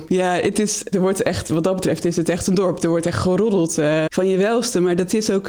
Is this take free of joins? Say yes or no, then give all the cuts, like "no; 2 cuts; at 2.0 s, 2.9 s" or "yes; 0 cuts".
no; 2 cuts; at 0.9 s, 4.1 s